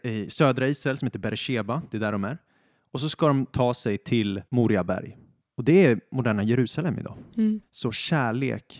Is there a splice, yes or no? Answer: yes